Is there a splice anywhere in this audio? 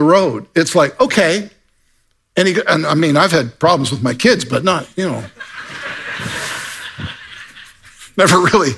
no; 0 cuts

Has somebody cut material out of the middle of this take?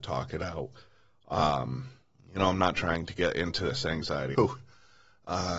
yes; 1 cut; at 4.3 s

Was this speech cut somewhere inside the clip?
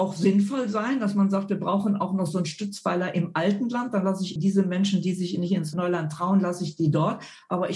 yes; 1 cut; at 4.4 s

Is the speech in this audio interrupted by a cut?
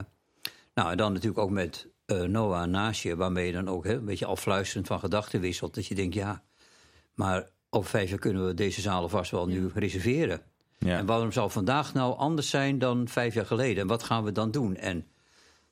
no; 0 cuts

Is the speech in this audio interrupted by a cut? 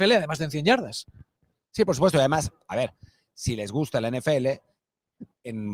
no; 0 cuts

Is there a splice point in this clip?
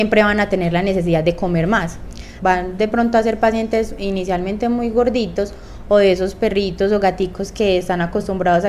yes; 1 cut; at 2.4 s

